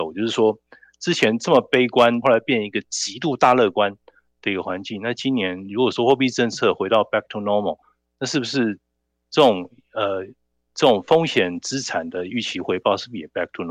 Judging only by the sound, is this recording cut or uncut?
cut